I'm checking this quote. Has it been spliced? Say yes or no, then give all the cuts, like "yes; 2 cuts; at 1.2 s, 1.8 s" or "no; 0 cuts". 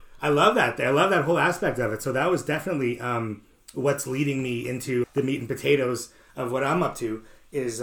yes; 1 cut; at 5.0 s